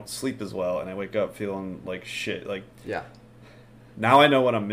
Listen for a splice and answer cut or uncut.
cut